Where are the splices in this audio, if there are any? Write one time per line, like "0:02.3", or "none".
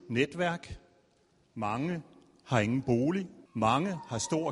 0:03.5